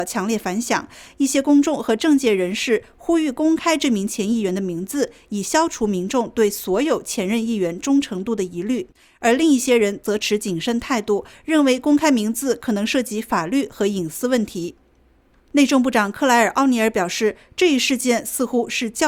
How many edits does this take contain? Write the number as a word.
zero